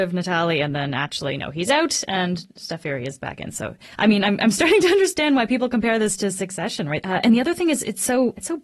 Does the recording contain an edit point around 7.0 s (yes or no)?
yes